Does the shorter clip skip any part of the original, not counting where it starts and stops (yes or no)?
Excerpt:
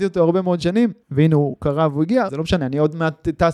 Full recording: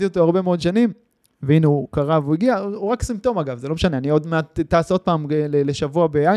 yes